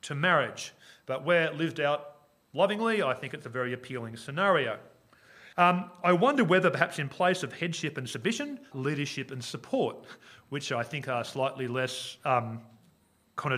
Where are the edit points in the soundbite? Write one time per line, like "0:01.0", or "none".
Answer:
0:05.5
0:08.7